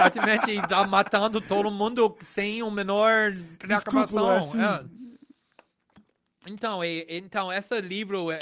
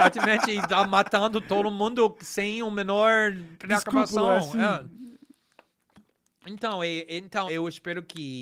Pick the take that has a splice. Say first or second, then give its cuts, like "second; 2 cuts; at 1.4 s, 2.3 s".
second; 1 cut; at 7.5 s